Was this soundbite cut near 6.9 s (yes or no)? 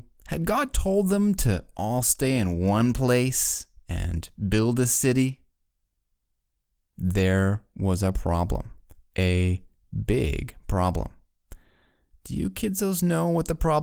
yes